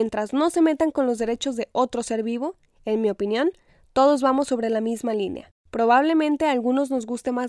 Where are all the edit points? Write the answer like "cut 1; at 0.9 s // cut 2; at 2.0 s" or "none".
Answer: none